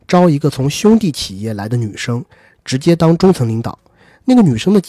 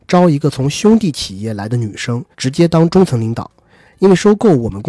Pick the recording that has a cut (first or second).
second